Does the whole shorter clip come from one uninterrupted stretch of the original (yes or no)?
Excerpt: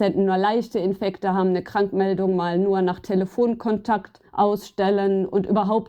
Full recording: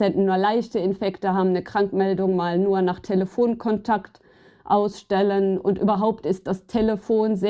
no